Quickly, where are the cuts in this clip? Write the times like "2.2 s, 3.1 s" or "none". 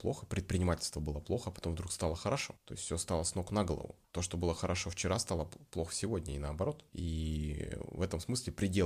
none